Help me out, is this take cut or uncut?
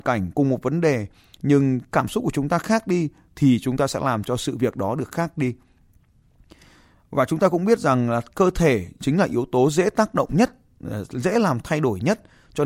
uncut